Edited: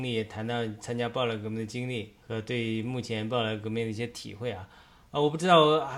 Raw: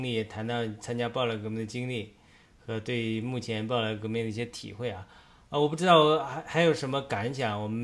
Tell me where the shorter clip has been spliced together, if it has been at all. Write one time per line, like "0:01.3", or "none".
0:02.2